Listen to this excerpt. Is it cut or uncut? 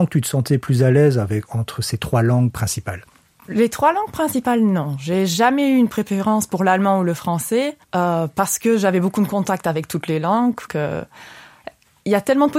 cut